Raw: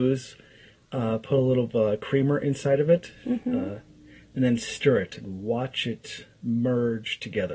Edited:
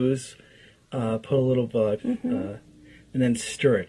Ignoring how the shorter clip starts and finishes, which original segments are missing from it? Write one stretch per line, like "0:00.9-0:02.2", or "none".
0:02.0-0:03.2